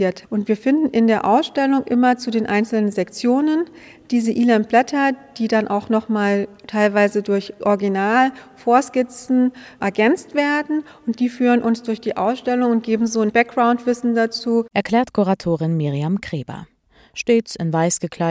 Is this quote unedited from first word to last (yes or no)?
yes